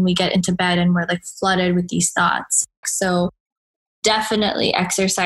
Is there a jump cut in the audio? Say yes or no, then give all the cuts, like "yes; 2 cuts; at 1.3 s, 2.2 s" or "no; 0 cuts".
yes; 1 cut; at 2.8 s